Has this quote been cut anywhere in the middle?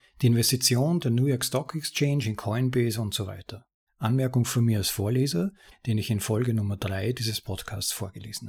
yes; 2 cuts; at 3.9 s, 5.7 s

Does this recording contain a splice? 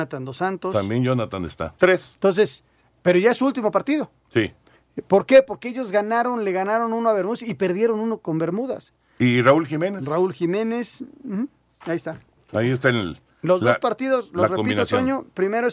yes; 2 cuts; at 1.8 s, 9.2 s

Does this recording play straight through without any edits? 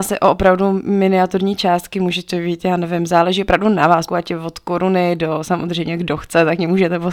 no; 1 cut; at 4.1 s

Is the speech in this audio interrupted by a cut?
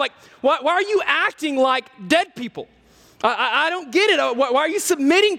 no; 0 cuts

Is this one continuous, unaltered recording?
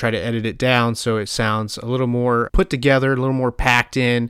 no; 1 cut; at 2.5 s

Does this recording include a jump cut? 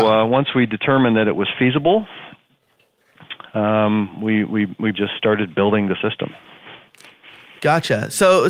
yes; 1 cut; at 4.9 s

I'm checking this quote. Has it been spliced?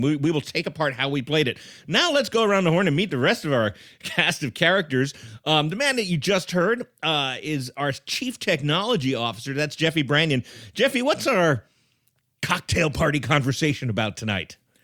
no; 0 cuts

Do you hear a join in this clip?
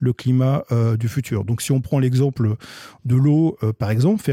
no; 0 cuts

